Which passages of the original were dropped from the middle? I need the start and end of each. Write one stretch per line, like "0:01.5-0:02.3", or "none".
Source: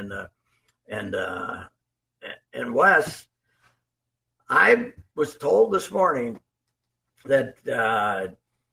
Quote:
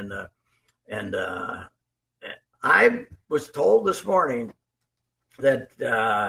0:02.4-0:04.3